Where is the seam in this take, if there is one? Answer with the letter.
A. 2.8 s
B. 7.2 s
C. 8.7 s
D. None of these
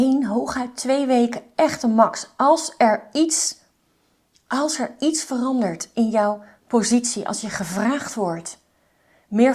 D